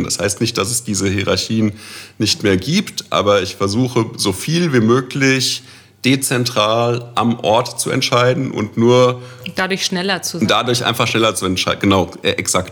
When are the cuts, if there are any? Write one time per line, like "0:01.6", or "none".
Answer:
none